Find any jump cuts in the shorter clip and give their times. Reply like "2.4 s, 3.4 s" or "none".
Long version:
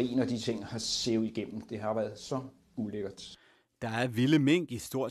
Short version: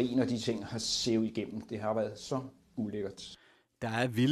none